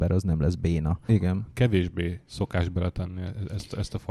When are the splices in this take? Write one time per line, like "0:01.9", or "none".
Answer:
0:01.1
0:02.2